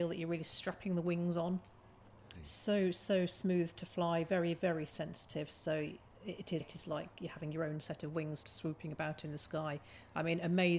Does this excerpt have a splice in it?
yes; 3 cuts; at 2.3 s, 6.6 s, 8.4 s

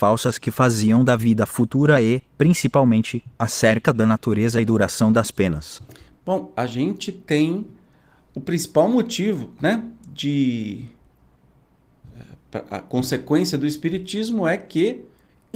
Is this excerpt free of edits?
yes; 0 cuts

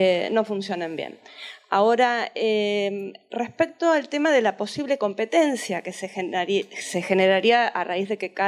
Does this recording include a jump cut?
no; 0 cuts

